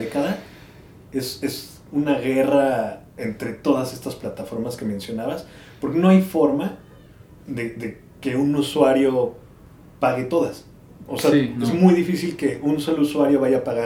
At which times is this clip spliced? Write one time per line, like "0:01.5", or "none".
0:03.1